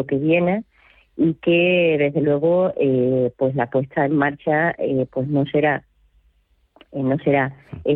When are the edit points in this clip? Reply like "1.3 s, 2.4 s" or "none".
none